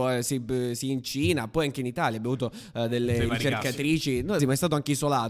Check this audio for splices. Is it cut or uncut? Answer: cut